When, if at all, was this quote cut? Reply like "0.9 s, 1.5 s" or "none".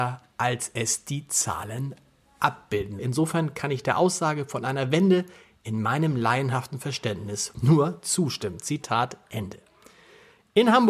3.0 s

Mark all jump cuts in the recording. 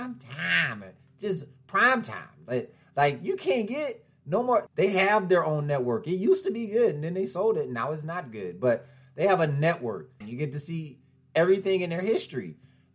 4.7 s, 10.2 s

